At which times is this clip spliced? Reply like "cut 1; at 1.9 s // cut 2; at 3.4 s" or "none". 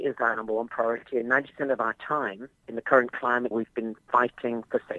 cut 1; at 3.5 s